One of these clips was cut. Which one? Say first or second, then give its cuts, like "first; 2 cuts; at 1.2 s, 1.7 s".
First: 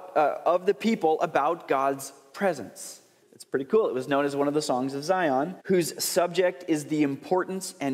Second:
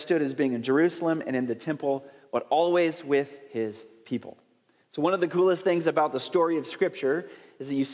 first; 2 cuts; at 3.2 s, 5.6 s